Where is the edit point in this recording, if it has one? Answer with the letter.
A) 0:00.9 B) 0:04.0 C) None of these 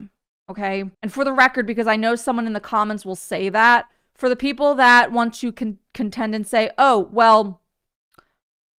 A